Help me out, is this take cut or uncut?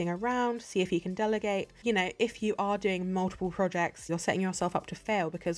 cut